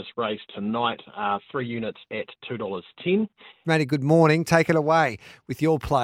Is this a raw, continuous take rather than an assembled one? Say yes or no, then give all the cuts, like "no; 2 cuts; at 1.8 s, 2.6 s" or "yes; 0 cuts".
no; 1 cut; at 3.6 s